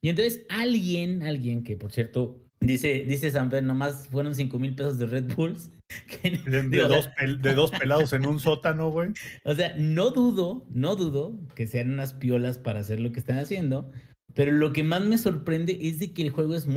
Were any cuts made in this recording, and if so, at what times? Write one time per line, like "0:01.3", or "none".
0:02.5

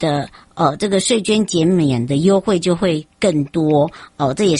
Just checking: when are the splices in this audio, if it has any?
none

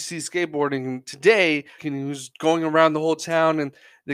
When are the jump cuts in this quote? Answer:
0:01.8

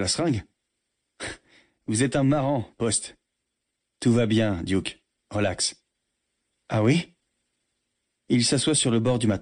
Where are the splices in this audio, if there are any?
none

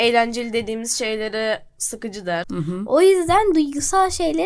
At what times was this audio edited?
0:02.4

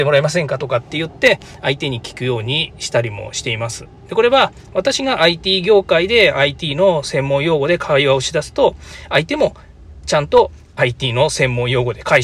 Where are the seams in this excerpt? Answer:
none

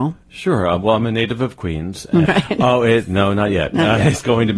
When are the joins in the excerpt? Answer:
0:02.3

